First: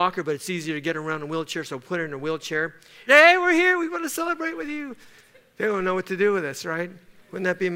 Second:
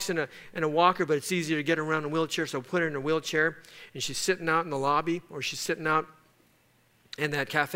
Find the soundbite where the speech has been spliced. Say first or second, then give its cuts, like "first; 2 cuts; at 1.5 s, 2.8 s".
first; 1 cut; at 3.1 s